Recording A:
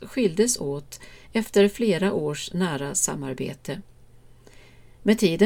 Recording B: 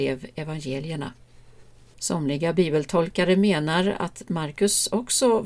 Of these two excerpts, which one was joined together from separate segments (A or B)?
B